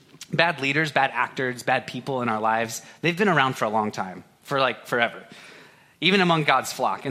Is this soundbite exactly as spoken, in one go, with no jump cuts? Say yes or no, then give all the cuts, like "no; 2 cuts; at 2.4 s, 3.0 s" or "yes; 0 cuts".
no; 1 cut; at 1.6 s